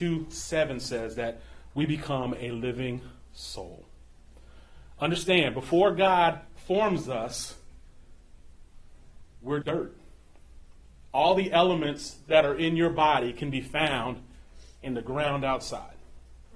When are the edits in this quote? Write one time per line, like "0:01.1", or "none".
0:09.6